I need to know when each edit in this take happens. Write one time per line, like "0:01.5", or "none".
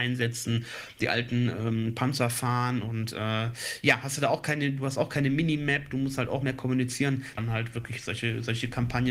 0:07.4

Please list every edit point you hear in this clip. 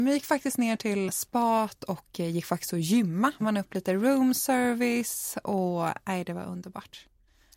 0:01.1
0:03.4

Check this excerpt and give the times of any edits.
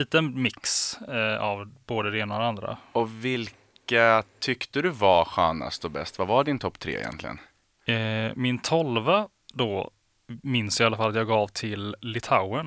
none

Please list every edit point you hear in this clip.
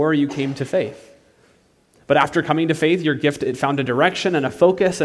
none

